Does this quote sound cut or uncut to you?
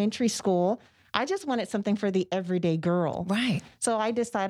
uncut